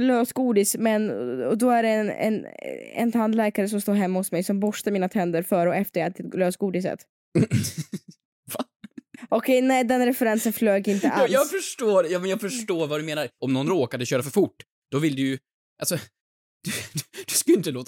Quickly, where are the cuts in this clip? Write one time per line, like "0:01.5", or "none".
0:13.4
0:15.7